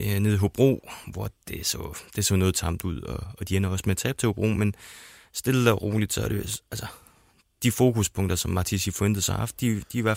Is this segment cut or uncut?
uncut